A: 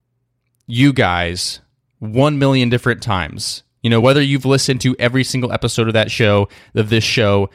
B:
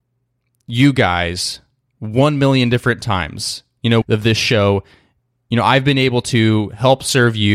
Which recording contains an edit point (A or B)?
B